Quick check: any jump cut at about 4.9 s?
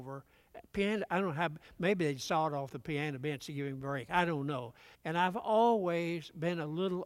yes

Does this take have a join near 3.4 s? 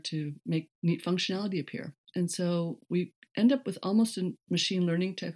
no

